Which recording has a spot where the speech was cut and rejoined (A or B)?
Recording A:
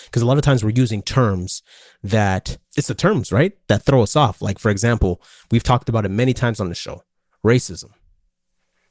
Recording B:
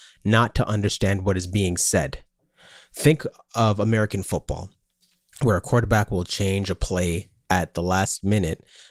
A